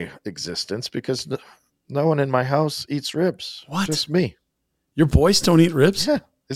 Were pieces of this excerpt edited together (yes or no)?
no